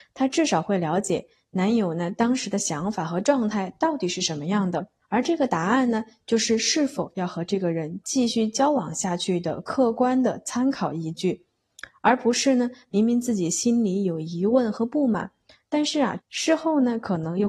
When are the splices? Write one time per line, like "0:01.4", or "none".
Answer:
0:05.0
0:16.2